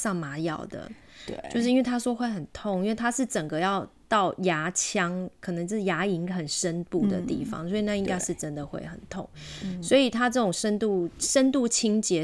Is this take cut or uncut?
uncut